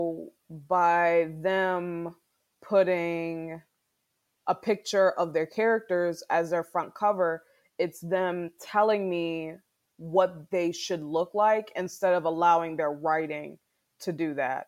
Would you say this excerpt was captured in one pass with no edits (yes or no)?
yes